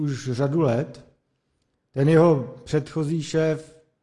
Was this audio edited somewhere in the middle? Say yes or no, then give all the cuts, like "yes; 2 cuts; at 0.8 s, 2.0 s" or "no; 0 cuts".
no; 0 cuts